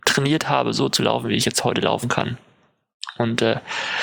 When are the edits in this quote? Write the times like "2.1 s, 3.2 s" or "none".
none

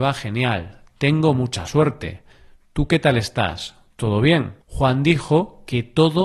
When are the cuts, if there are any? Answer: 4.6 s

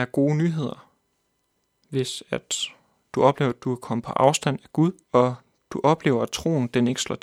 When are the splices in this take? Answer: 5.0 s

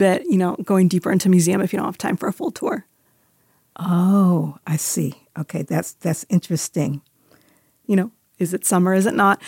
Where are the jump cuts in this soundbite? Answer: 7.8 s

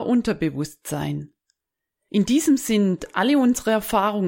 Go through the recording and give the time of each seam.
none

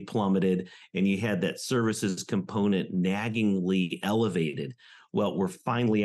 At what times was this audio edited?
none

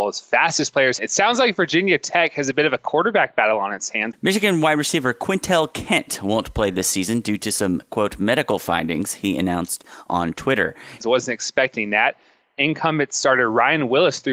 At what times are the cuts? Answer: 1.0 s, 4.1 s, 11.0 s

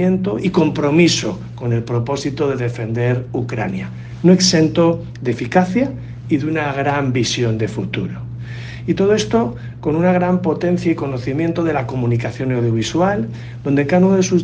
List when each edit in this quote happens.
none

